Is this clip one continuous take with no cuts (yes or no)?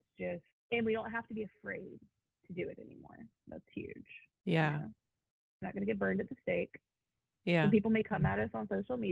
no